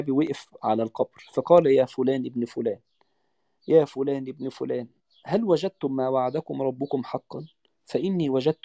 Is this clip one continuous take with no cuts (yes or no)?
yes